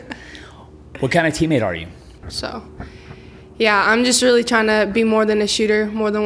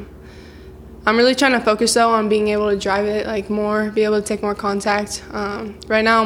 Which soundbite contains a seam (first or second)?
first